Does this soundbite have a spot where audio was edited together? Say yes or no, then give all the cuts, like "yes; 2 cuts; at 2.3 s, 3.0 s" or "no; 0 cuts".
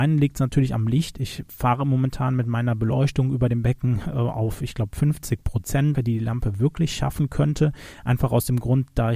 yes; 1 cut; at 5.9 s